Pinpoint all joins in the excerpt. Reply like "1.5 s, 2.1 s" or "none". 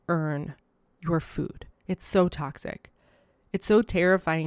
1.7 s